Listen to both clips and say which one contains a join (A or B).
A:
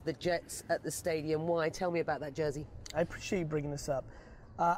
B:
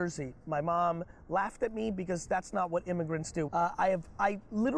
B